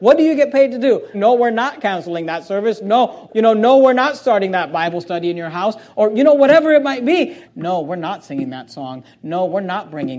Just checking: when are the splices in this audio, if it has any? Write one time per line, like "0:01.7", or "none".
0:01.1
0:03.3
0:07.4

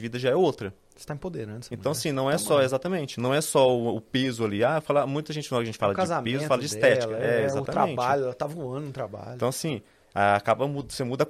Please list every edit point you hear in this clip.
none

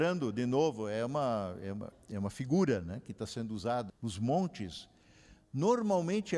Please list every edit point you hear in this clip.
0:01.9
0:03.9

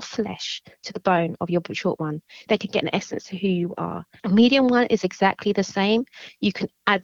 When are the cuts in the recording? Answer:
0:02.5
0:04.2

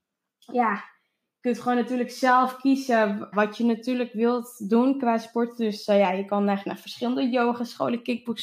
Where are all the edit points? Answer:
0:03.3

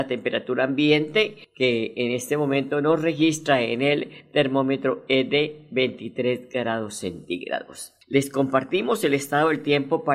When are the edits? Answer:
0:08.0

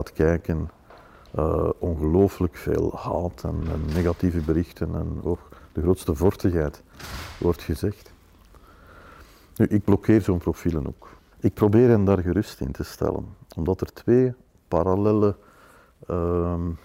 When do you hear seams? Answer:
0:11.3

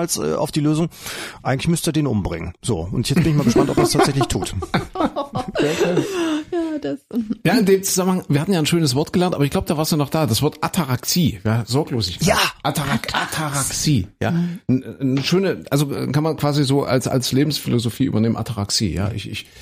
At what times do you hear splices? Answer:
none

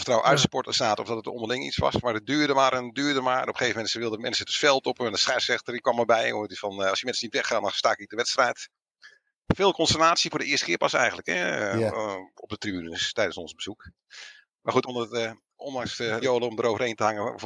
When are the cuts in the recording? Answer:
0:14.8
0:16.2

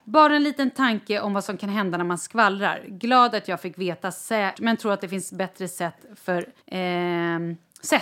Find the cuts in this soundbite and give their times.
0:04.5
0:06.6

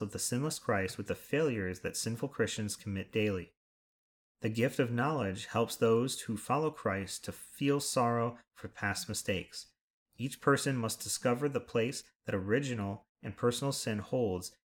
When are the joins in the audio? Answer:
none

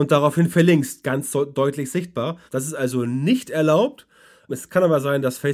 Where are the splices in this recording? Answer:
0:02.5
0:04.5

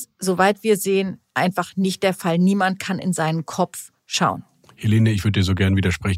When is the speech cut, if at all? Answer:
none

